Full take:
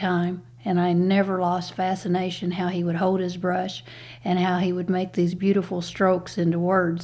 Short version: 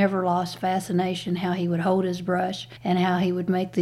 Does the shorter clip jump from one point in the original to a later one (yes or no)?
yes